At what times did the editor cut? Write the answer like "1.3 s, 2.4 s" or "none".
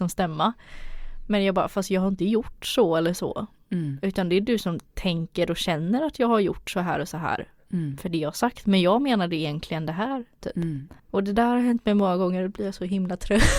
11.0 s

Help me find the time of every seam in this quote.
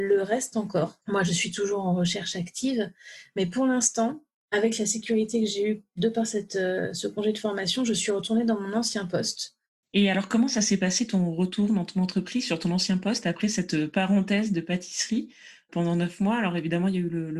none

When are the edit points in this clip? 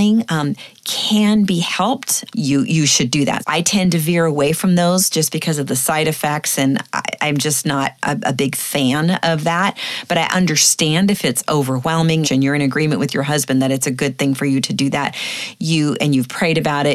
2.3 s, 3.4 s, 12.2 s

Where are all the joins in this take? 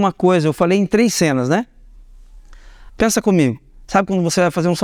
2.9 s

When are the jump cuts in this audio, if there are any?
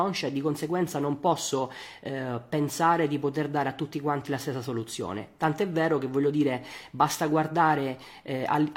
none

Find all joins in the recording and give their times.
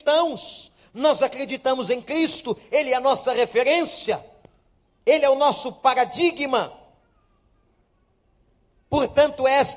5.0 s

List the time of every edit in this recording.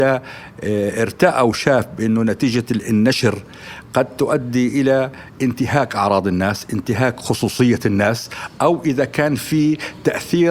none

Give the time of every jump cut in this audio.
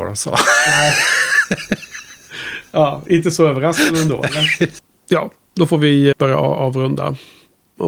6.1 s

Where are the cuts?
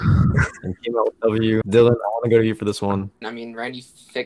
1.6 s, 3.2 s

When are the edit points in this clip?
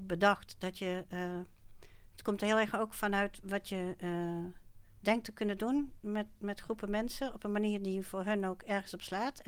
none

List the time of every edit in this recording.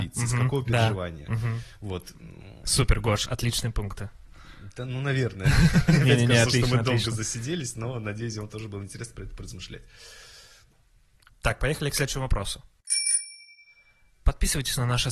none

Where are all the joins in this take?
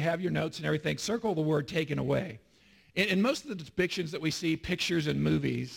none

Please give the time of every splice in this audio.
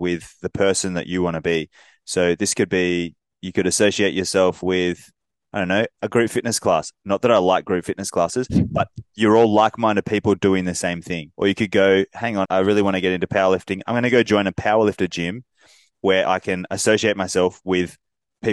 11.3 s, 12.5 s

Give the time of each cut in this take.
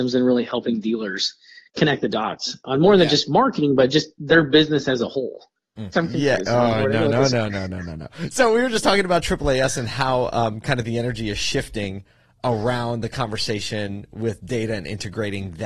5.9 s

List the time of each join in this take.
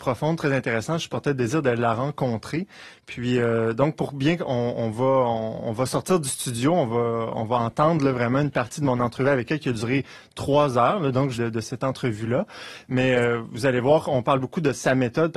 11.3 s

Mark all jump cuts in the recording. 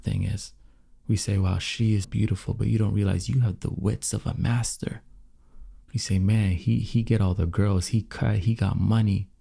2.0 s, 5.8 s

